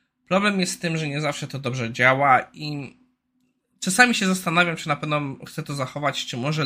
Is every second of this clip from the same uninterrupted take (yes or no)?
yes